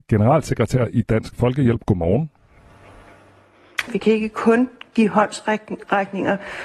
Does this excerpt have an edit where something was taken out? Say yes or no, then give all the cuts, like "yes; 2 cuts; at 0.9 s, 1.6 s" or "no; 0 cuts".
yes; 1 cut; at 3.9 s